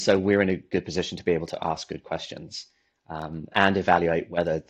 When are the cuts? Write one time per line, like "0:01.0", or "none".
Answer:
0:03.5